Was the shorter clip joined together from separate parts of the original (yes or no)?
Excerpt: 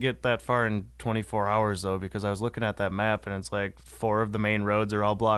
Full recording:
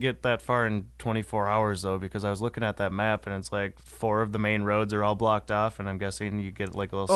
no